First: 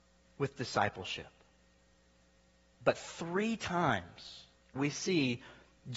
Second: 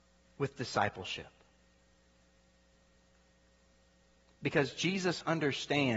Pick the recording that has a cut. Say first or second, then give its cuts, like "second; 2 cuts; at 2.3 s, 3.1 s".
first; 2 cuts; at 2.7 s, 4.8 s